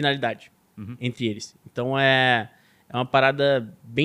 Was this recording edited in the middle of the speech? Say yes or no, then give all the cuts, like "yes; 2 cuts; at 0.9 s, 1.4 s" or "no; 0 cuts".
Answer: no; 0 cuts